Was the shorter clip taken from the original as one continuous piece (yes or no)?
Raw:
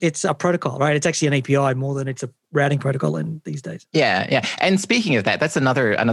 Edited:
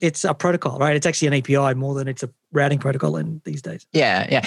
yes